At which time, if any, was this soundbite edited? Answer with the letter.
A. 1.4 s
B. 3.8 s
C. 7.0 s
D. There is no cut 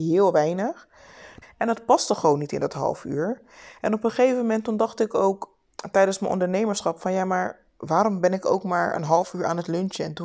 A